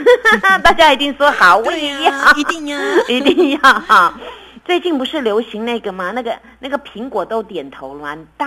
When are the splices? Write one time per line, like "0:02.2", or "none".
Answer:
0:04.6